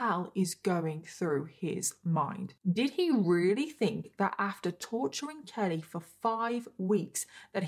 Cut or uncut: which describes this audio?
uncut